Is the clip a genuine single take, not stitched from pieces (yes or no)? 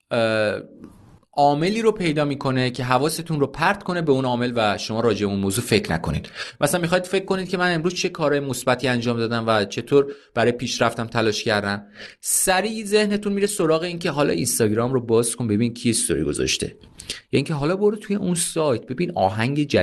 yes